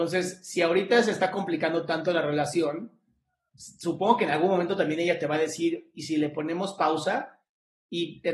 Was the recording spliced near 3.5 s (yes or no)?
no